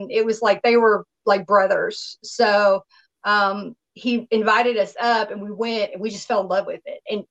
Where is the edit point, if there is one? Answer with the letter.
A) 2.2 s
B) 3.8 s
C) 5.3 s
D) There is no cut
D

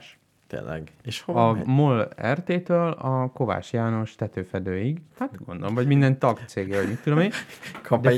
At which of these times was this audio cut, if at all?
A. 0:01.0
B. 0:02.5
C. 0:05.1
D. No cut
C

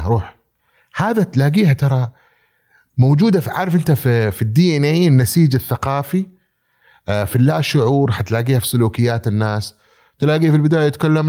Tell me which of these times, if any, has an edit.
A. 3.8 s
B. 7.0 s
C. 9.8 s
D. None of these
D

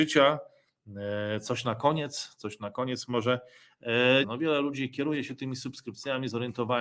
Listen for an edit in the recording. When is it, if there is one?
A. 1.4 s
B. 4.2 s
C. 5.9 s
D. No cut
B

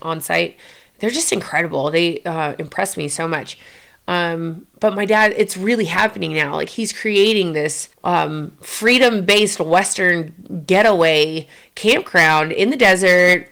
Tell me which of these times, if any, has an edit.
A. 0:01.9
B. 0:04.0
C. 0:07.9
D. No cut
C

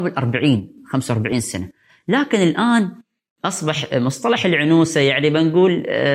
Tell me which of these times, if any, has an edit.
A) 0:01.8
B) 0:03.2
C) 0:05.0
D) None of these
D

